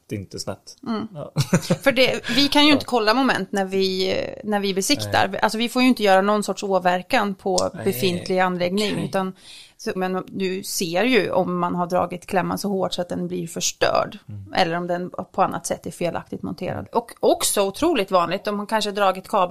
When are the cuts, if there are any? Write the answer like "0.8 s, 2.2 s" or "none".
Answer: 10.0 s, 16.9 s